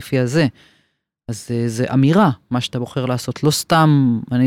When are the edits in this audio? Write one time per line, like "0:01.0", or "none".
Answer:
none